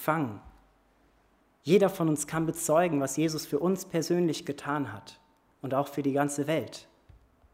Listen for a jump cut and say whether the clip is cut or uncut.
uncut